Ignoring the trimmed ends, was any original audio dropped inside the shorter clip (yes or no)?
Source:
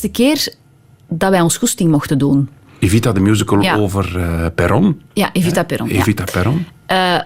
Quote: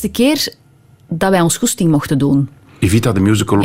no